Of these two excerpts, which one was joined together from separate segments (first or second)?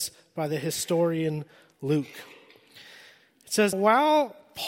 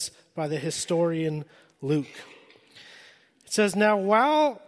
first